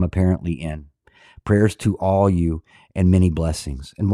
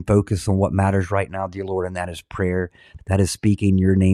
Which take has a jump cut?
second; 1 cut; at 3.0 s

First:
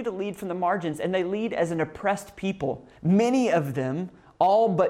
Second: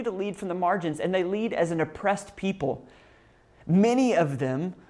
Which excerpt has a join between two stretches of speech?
first; 1 cut; at 3.0 s

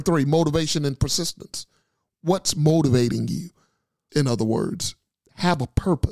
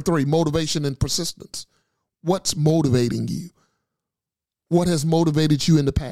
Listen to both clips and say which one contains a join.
first; 1 cut; at 4.1 s

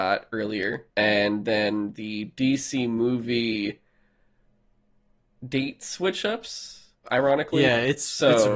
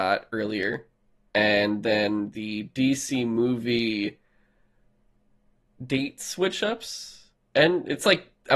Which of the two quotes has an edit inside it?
first; 2 cuts; at 0.9 s, 7.0 s

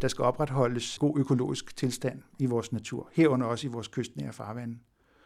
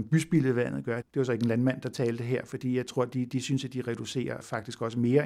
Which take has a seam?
second; 1 cut; at 1.0 s

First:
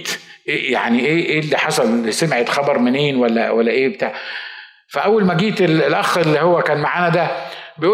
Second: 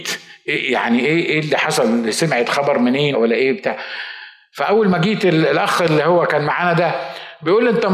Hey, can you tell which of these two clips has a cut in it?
second; 1 cut; at 3.1 s

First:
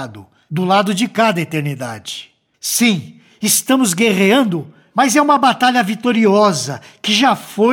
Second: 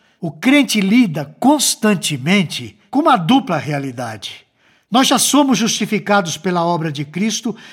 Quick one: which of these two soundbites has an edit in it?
first; 1 cut; at 2.5 s

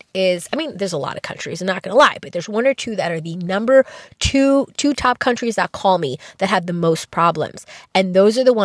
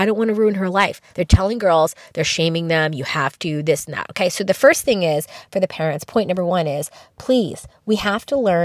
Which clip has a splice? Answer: second; 1 cut; at 1.1 s

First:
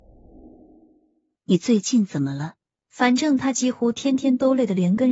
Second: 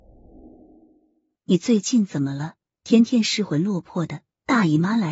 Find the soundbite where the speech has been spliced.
first; 1 cut; at 2.7 s

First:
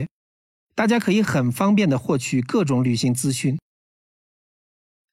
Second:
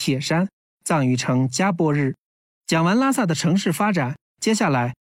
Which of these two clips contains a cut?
second; 1 cut; at 2.6 s

